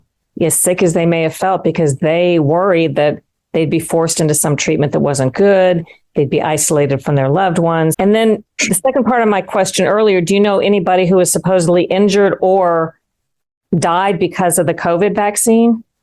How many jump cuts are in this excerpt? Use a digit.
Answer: 1